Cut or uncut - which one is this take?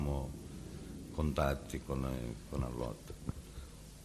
cut